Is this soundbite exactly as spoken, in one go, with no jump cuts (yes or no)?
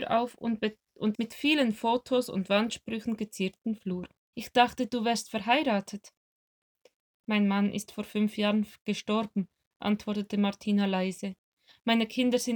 no